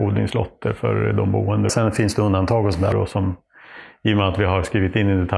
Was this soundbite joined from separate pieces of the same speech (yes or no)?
yes